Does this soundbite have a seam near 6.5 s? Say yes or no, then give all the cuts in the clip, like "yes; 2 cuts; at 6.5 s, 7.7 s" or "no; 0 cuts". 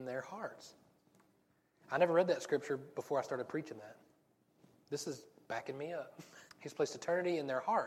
yes; 1 cut; at 6.5 s